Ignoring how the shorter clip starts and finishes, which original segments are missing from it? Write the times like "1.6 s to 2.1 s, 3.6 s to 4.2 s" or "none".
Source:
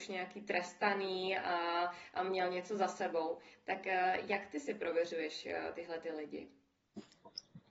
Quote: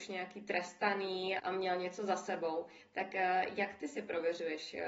1.4 s to 2.1 s